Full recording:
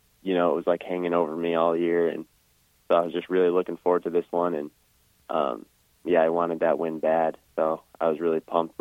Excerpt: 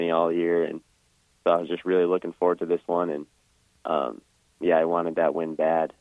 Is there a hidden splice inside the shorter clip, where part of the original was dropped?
no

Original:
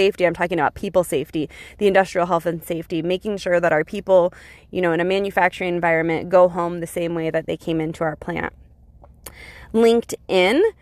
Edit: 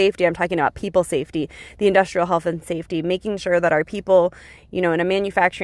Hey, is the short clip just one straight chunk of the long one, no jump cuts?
yes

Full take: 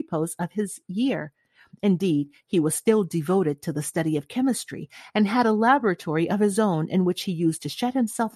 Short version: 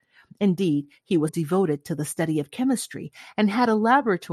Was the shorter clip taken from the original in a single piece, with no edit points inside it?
no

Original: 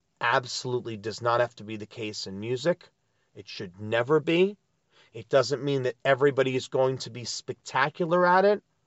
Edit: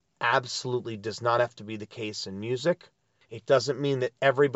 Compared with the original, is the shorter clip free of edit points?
no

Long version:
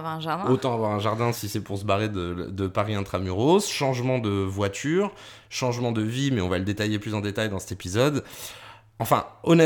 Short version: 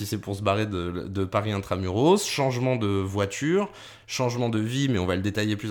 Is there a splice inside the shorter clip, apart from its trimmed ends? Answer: no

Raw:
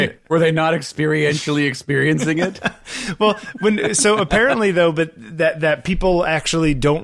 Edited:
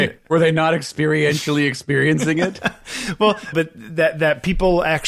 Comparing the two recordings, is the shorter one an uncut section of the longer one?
no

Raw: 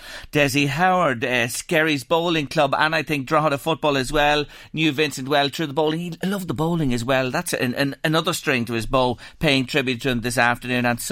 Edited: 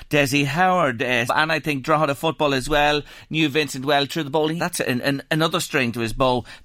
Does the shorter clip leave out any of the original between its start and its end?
yes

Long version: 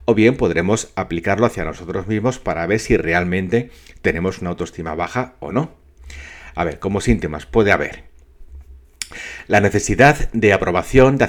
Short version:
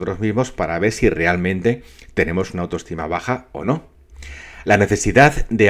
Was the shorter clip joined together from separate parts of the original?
yes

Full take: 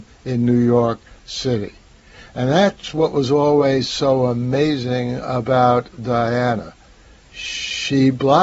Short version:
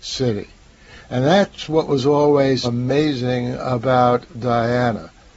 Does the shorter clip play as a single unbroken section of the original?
no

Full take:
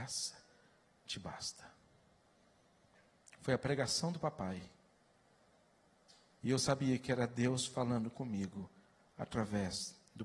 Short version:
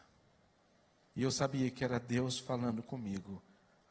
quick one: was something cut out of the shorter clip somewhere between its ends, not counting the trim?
yes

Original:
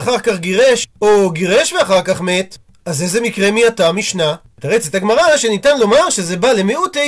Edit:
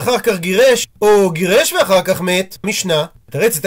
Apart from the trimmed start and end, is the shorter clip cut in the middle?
yes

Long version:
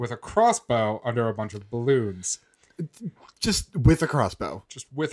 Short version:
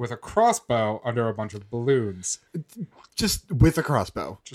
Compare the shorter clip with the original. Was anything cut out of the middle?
yes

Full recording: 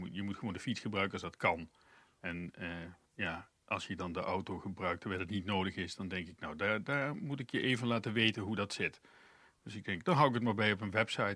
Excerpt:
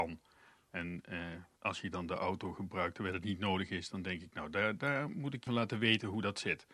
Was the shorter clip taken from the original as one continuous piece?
no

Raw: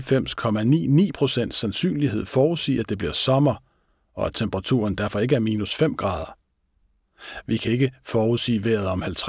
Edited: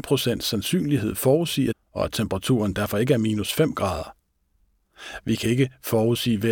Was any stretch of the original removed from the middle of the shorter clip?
yes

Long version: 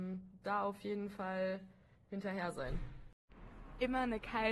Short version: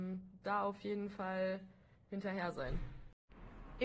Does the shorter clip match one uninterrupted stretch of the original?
yes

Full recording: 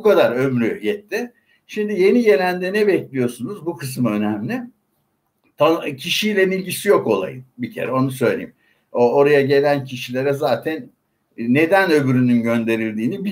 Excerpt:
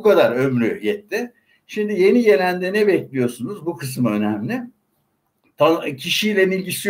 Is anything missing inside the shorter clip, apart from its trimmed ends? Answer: no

